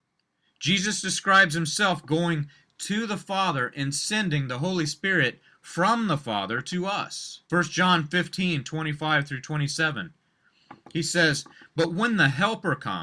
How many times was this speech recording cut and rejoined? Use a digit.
1